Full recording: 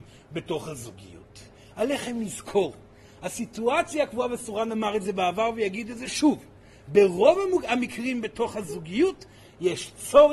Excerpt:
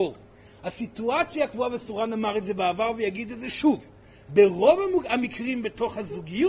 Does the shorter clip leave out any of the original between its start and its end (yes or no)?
no